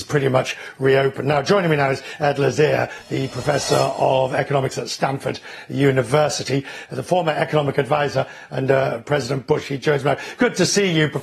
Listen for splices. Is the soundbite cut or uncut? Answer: uncut